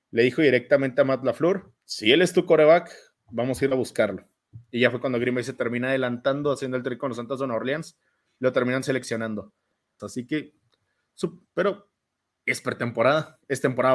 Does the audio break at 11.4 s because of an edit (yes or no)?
yes